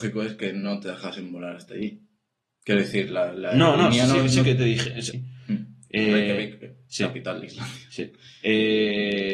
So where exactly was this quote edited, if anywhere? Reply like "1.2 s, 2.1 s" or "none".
5.1 s